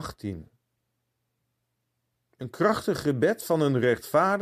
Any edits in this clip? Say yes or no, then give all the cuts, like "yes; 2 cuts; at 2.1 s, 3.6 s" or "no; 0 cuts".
no; 0 cuts